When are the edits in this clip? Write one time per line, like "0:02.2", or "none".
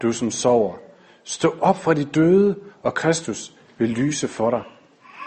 none